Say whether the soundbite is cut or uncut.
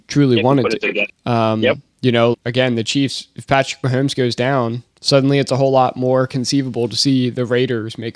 cut